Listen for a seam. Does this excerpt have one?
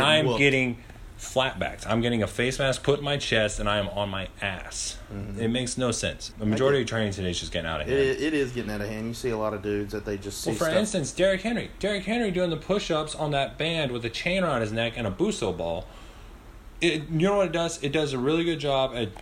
yes; 1 cut; at 6.3 s

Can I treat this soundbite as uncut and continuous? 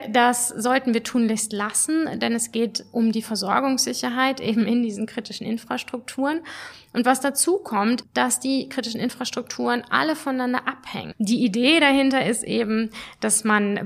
no; 2 cuts; at 8.0 s, 11.1 s

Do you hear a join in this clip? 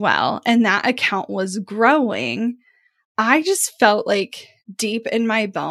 no; 0 cuts

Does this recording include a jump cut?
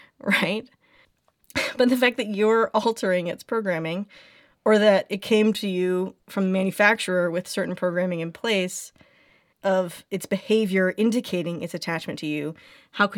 yes; 1 cut; at 9.5 s

